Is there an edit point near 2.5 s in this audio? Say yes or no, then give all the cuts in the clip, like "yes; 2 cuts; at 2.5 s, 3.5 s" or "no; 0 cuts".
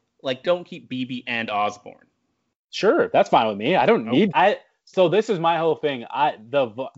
no; 1 cut; at 4.3 s